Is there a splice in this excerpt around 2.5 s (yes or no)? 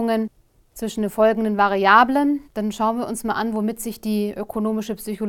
yes